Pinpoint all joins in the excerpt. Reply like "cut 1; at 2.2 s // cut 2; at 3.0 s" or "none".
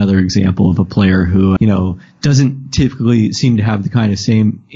cut 1; at 1.6 s